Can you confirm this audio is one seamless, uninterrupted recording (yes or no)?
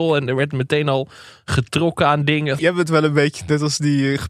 no